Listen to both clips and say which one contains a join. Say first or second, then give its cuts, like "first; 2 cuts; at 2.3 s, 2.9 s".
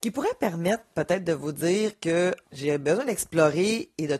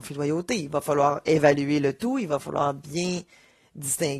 first; 1 cut; at 2.4 s